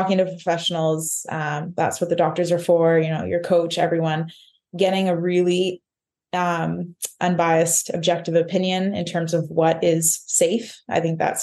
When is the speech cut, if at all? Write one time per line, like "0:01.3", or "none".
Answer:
none